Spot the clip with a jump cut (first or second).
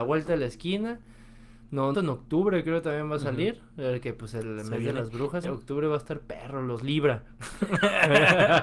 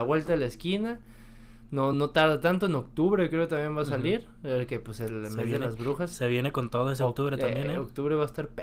first